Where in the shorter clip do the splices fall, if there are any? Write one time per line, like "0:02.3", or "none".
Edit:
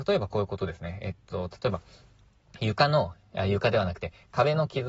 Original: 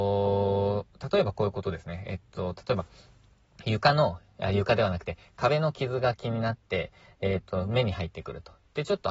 none